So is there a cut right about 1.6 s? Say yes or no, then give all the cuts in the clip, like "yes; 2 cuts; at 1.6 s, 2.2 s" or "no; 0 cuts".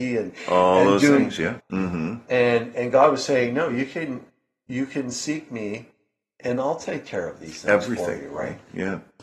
yes; 1 cut; at 1.6 s